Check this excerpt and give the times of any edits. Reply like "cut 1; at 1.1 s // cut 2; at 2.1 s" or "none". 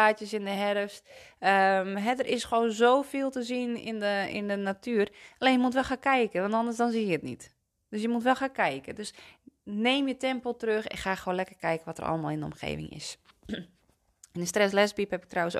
none